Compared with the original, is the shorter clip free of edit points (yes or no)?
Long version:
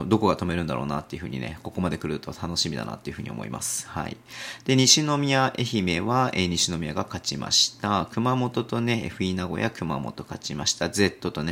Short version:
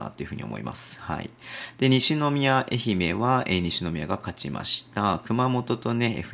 yes